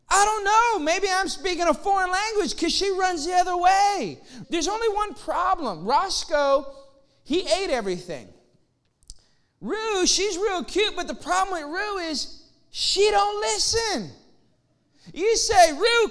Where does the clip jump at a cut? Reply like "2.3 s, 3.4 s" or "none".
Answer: 4.4 s